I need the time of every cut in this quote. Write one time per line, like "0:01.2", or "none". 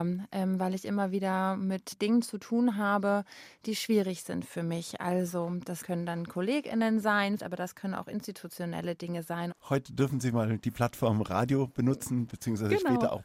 0:07.4
0:09.5